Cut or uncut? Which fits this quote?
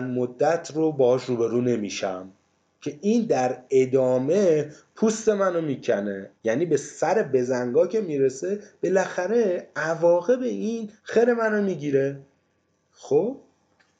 cut